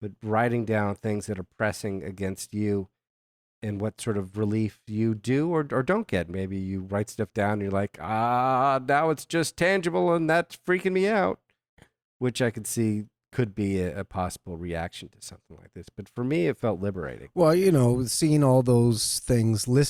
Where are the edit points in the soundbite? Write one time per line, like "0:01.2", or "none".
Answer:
0:06.3